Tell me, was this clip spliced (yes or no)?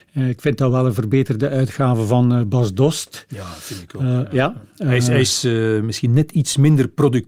no